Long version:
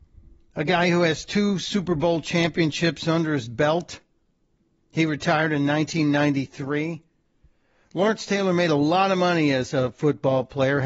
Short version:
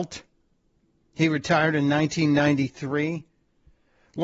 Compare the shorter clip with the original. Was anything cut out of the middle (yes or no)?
no